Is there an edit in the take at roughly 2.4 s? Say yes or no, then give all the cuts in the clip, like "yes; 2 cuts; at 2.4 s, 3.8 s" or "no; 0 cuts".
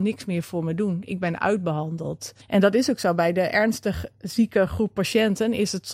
yes; 1 cut; at 2.4 s